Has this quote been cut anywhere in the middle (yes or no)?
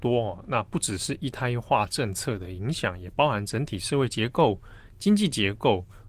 no